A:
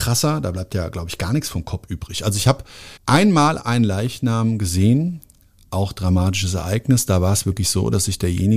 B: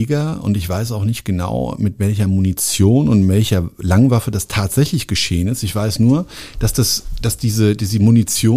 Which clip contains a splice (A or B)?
A